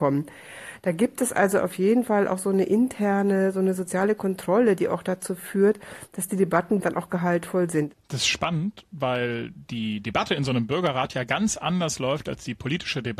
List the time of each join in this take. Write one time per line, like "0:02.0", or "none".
0:06.8